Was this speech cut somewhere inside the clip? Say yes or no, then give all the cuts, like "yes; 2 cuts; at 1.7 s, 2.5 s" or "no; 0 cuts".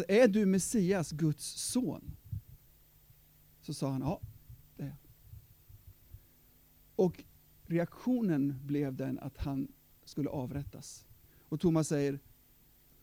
yes; 1 cut; at 11.3 s